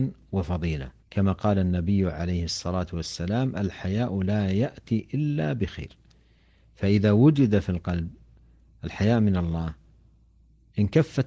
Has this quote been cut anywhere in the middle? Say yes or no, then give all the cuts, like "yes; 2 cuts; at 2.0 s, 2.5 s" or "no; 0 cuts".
yes; 1 cut; at 1.0 s